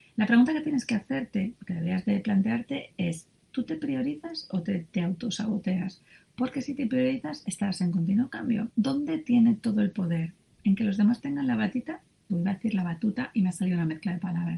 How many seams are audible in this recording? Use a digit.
2